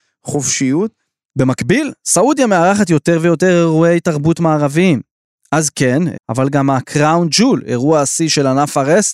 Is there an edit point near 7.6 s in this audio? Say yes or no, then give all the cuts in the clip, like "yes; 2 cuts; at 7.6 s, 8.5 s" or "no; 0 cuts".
no; 1 cut; at 6.1 s